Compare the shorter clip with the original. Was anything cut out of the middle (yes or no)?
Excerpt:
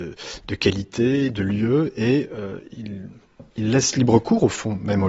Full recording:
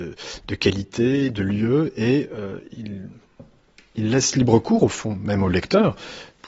yes